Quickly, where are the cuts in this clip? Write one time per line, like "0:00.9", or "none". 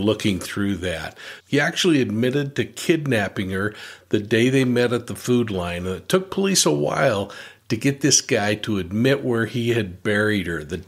0:01.4